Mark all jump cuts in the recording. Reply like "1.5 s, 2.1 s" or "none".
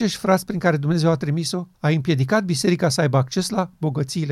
1.7 s